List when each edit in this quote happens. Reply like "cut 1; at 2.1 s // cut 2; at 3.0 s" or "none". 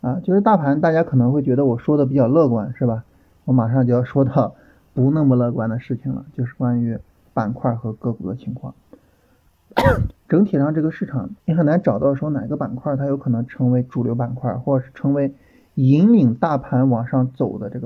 cut 1; at 10.1 s // cut 2; at 11.4 s